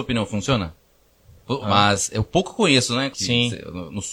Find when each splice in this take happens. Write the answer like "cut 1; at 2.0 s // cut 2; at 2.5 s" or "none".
cut 1; at 1.6 s // cut 2; at 3.1 s